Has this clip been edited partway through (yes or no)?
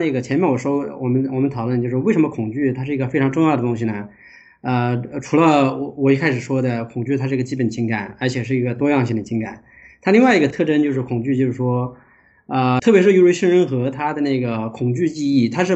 yes